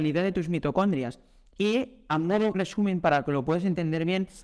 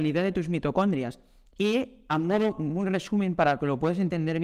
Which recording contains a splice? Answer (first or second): first